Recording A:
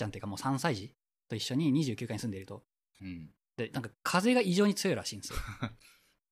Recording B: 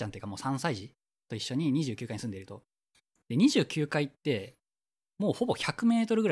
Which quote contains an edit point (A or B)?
A